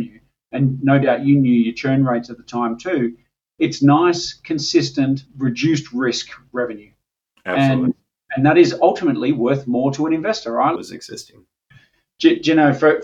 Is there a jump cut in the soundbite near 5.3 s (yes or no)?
yes